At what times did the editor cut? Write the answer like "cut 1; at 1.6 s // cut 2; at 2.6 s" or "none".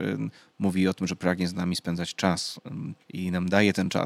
cut 1; at 3.0 s